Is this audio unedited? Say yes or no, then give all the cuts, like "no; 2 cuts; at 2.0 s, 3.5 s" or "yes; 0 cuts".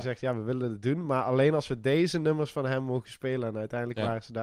yes; 0 cuts